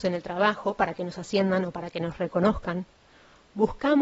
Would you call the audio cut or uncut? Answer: uncut